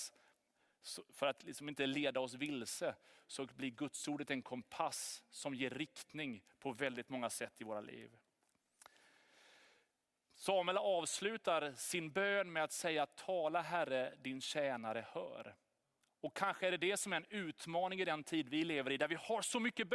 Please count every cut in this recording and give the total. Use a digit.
0